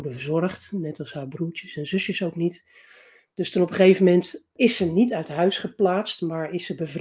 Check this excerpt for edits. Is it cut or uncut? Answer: uncut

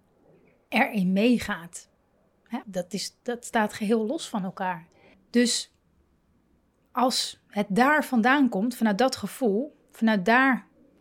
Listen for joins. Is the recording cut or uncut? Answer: cut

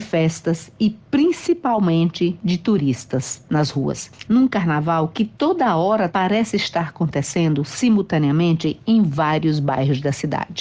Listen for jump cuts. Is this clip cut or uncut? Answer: cut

